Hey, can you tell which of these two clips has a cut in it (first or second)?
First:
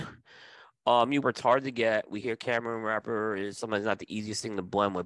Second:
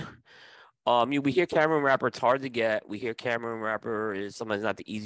first